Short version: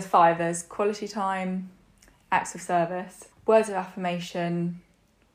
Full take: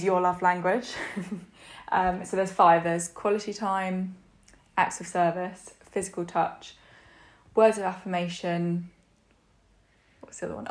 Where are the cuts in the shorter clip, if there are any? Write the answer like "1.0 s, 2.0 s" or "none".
3.3 s